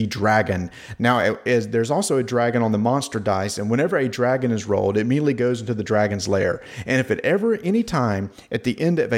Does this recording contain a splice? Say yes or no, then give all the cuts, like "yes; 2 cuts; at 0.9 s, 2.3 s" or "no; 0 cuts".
no; 0 cuts